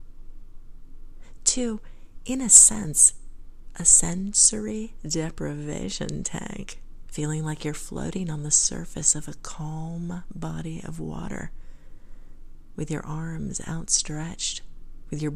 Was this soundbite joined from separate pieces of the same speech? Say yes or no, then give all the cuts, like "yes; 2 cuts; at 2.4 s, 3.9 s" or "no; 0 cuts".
yes; 1 cut; at 7.1 s